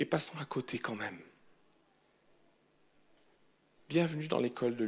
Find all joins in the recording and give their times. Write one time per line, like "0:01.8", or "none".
none